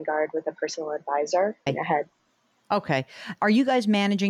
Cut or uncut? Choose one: cut